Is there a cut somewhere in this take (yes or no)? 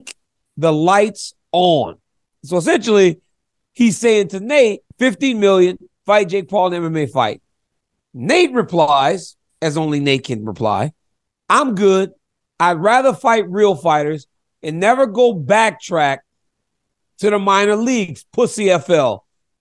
yes